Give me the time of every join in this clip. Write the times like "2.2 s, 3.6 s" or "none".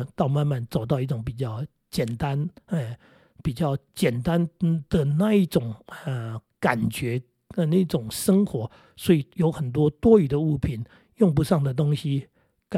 none

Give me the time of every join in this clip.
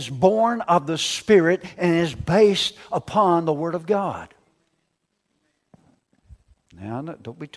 none

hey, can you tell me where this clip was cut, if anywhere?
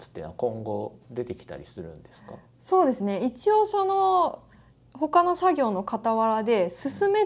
none

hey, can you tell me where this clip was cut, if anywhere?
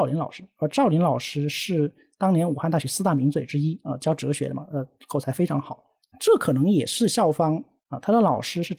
6.0 s, 7.8 s

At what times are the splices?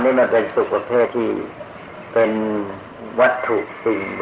1.1 s

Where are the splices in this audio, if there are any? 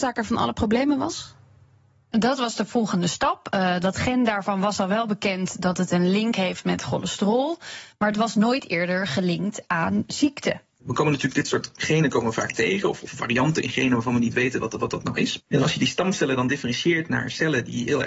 15.4 s

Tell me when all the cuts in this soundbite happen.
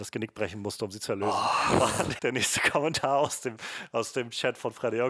2.2 s

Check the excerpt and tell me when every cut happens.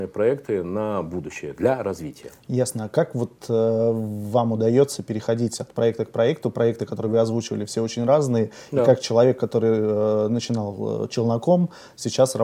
none

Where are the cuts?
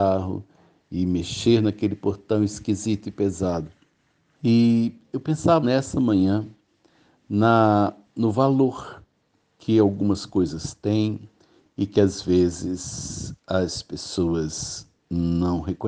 4.3 s, 5.6 s

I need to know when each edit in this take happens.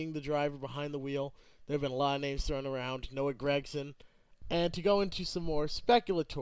4.4 s

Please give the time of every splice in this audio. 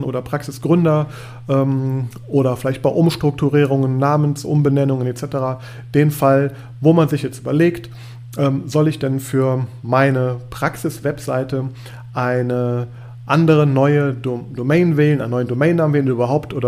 none

